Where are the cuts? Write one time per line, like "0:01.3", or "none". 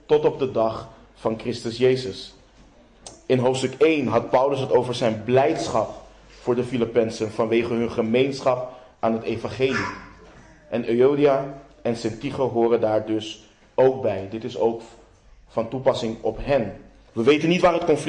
0:17.1